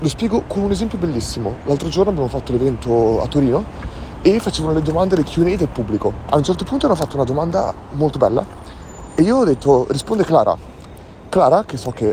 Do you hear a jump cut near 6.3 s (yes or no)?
yes